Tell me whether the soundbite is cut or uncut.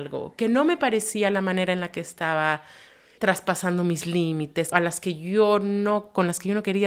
cut